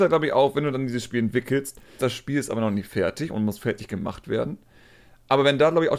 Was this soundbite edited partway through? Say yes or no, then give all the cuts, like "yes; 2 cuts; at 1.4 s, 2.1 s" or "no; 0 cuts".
yes; 1 cut; at 2.0 s